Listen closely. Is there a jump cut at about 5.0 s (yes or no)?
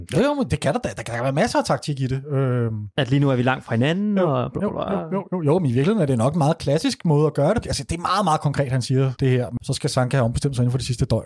no